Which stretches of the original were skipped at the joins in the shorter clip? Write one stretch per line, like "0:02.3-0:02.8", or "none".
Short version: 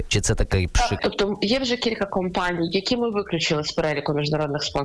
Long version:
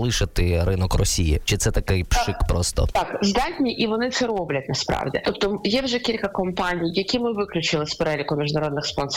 0:02.4-0:05.2